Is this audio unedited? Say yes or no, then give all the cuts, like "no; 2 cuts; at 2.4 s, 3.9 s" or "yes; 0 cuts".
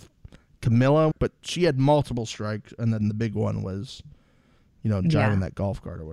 no; 1 cut; at 1.1 s